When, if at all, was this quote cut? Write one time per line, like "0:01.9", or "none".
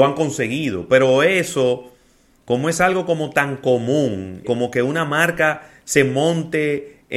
0:02.4
0:04.4